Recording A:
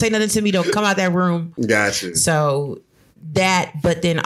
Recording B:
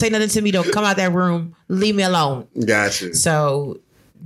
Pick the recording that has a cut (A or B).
A